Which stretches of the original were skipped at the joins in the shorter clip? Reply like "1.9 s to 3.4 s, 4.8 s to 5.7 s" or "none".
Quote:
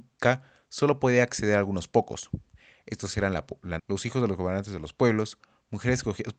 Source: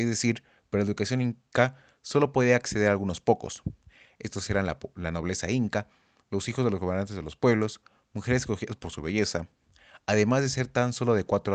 5.1 s to 6.2 s